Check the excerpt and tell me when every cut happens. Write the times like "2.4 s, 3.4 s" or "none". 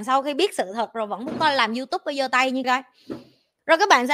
2.6 s